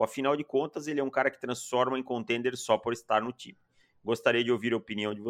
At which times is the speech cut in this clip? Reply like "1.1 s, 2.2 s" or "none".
none